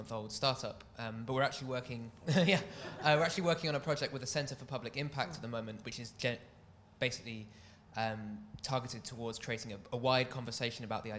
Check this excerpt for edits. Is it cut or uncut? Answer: cut